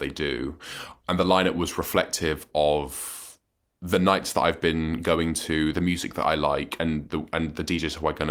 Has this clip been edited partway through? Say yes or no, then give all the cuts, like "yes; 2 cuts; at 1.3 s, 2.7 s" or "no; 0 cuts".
yes; 1 cut; at 5.7 s